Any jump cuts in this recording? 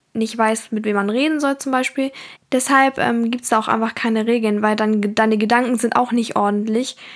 yes; 1 cut; at 2.4 s

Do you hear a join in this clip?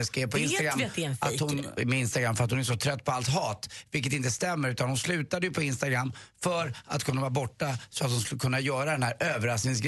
yes; 1 cut; at 1.8 s

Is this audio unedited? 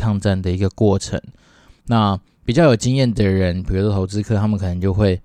yes; 0 cuts

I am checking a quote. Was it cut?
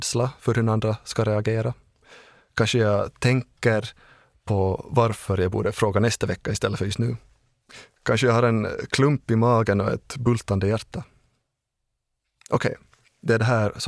no; 0 cuts

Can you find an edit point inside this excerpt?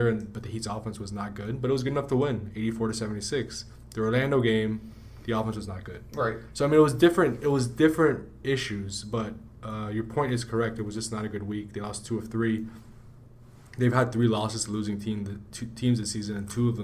no; 0 cuts

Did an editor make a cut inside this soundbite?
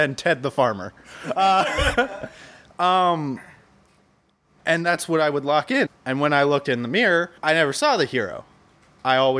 yes; 2 cuts; at 5.9 s, 7.4 s

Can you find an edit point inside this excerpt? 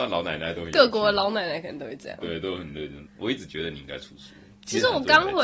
yes; 1 cut; at 3.0 s

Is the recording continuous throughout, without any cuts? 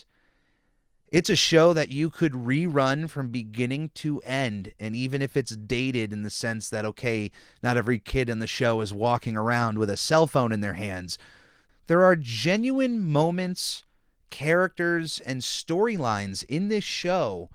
yes; 0 cuts

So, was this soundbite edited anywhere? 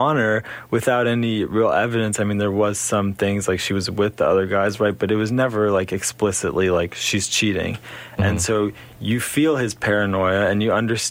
no; 0 cuts

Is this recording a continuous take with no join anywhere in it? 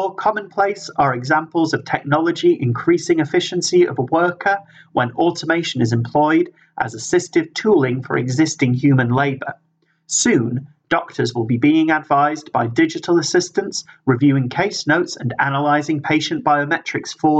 yes; 0 cuts

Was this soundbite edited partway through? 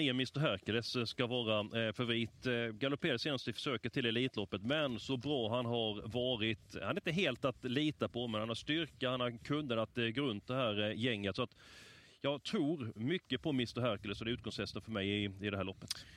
no; 0 cuts

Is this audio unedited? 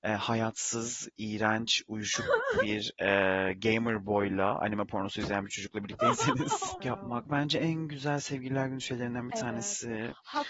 no; 1 cut; at 6.8 s

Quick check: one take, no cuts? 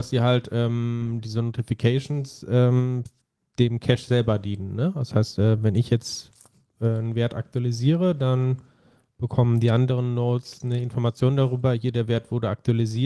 yes; 0 cuts

